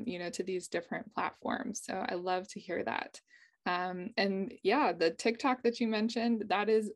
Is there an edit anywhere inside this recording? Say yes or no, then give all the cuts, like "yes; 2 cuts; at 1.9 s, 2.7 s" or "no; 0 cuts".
no; 0 cuts